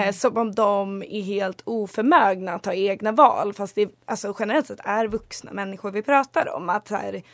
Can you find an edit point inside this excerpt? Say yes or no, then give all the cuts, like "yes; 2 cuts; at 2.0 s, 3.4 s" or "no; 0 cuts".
no; 0 cuts